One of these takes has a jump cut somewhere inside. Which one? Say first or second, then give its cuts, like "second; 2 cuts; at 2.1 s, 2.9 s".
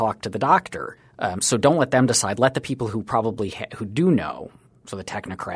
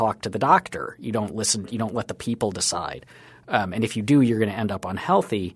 first; 1 cut; at 1.0 s